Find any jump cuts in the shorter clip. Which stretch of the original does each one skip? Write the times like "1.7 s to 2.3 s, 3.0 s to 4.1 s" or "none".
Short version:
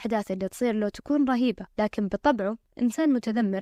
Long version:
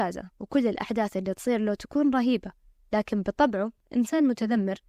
2.6 s to 2.9 s